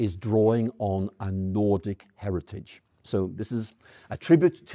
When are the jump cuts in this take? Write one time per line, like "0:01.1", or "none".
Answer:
none